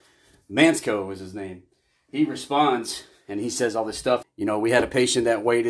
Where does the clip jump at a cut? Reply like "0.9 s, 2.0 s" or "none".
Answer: 4.2 s